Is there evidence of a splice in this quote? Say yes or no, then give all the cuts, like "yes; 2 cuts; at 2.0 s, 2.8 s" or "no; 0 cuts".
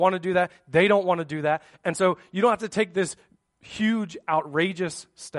no; 0 cuts